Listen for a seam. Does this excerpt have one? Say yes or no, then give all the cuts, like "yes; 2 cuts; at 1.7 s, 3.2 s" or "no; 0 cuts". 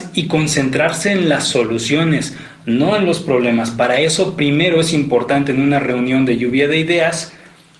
no; 0 cuts